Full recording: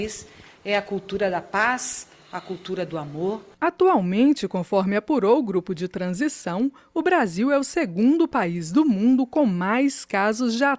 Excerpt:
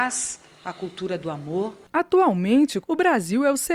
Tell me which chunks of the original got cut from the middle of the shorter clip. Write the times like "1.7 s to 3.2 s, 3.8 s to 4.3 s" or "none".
4.5 s to 6.9 s